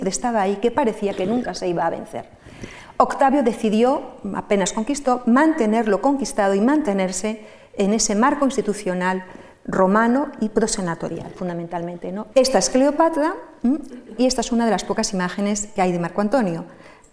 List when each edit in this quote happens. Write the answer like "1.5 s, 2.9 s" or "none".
12.3 s, 14.2 s